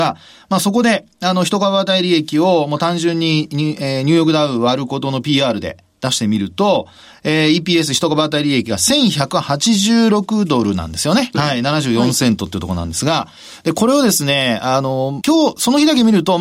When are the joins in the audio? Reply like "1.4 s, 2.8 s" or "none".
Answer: 11.3 s, 15.2 s

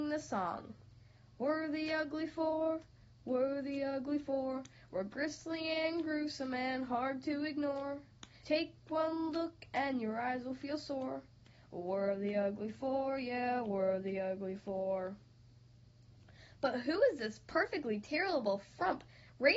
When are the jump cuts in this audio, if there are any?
8.4 s

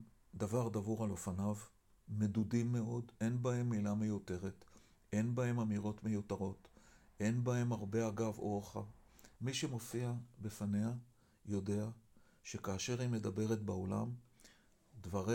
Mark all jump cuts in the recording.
3.1 s, 9.4 s

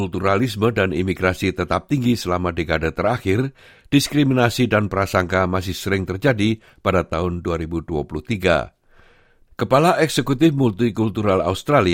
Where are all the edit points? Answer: 9.5 s

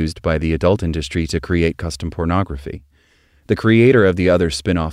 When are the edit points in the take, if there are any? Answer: none

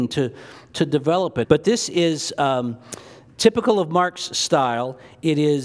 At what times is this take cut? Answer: 1.4 s

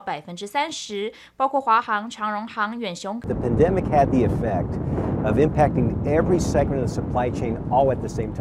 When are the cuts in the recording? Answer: 3.2 s

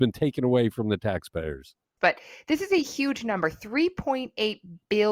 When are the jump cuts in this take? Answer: 2.0 s

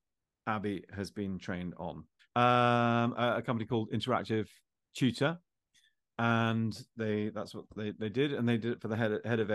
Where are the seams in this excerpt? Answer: 2.3 s

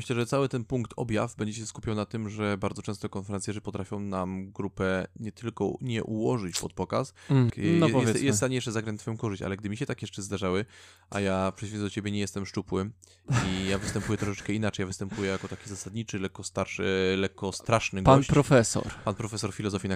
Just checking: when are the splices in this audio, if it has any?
7.5 s

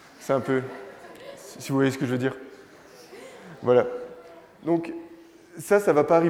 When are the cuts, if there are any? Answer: none

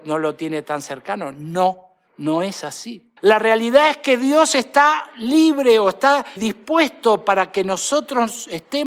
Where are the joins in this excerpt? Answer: 3.2 s, 6.4 s

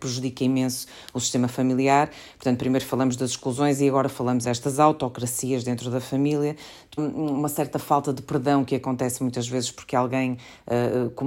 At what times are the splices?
4.4 s, 7.0 s

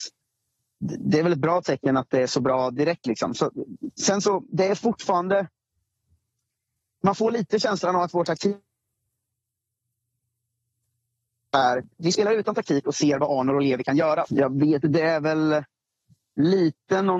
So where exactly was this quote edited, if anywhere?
14.2 s

